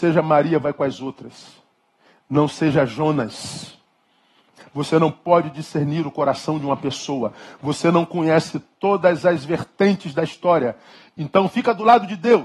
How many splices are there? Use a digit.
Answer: 1